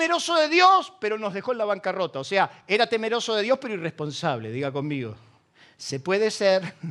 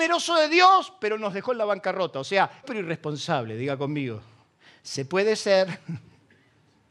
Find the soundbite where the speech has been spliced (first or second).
second